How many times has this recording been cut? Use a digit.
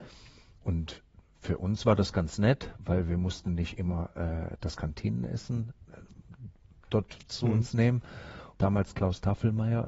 1